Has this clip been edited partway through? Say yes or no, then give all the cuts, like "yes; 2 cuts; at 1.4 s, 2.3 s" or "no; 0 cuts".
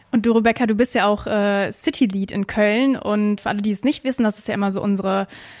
yes; 1 cut; at 3.4 s